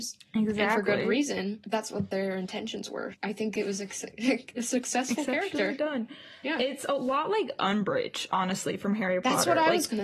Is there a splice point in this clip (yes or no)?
yes